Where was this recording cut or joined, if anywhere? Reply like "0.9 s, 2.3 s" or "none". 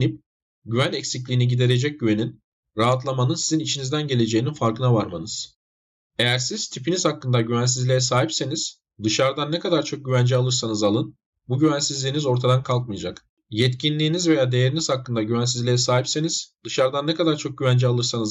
none